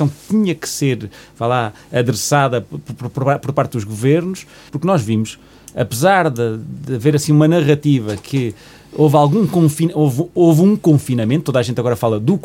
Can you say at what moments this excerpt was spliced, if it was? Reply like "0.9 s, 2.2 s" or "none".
4.7 s